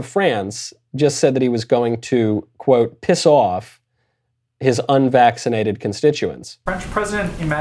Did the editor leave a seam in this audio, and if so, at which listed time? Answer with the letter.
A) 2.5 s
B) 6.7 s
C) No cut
B